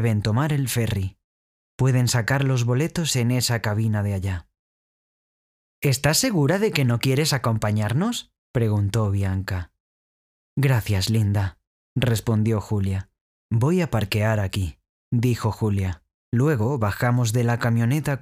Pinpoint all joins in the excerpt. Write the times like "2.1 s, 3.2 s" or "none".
13.3 s, 16.2 s